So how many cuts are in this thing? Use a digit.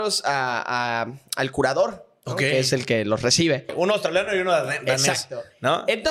1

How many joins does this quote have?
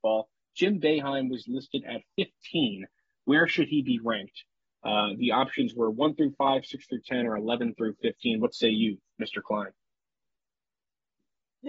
0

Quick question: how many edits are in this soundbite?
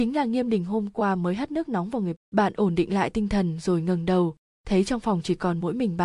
1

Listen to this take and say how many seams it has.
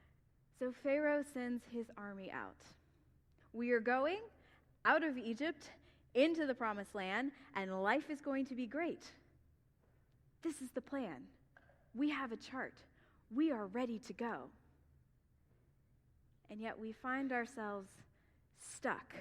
1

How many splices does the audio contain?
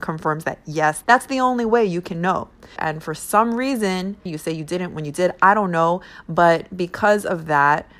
3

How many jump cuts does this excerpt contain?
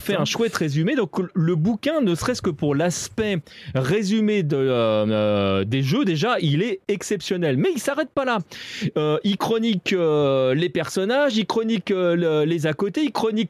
0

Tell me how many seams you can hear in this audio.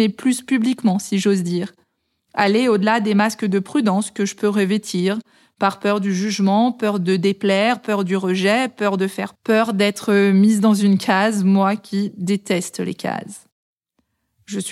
1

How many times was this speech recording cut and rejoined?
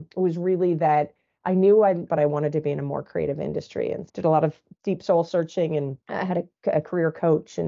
3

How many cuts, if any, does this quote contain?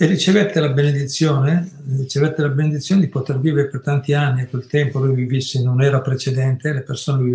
0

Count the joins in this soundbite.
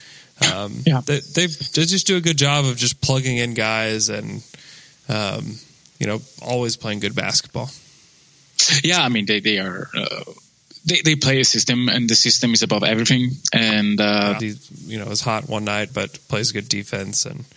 2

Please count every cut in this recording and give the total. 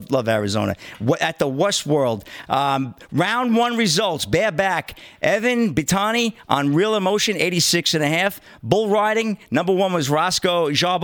0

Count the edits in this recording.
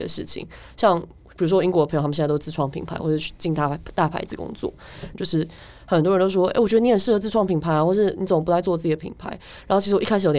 1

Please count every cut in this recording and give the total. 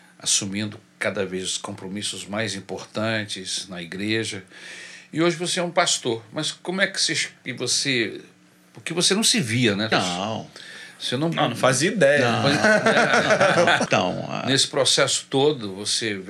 2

